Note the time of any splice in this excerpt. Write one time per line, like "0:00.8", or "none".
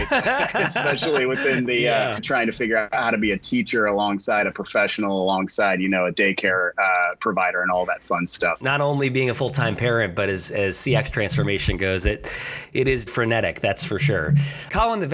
0:02.2
0:08.6
0:13.1